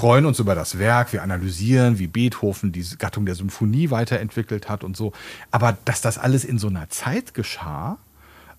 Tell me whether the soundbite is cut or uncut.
uncut